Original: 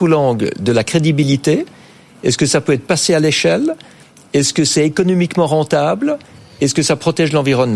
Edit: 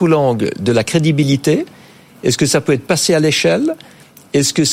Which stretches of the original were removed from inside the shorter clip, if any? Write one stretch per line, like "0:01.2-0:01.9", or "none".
none